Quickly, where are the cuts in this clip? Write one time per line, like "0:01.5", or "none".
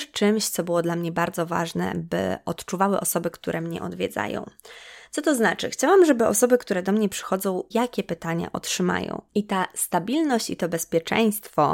0:07.7
0:09.3